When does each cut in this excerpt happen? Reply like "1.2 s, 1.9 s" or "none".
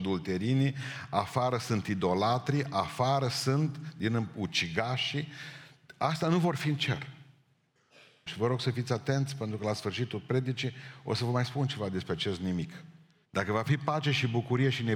8.3 s, 13.2 s